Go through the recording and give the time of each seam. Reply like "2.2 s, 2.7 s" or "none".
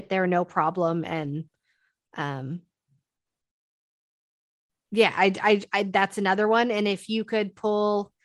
none